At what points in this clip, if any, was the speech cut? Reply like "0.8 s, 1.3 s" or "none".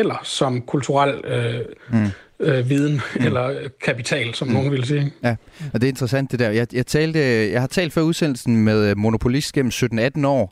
none